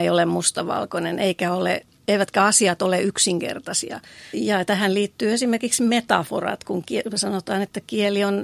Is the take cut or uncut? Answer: cut